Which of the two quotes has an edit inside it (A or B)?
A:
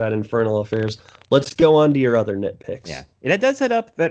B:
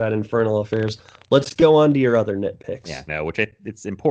B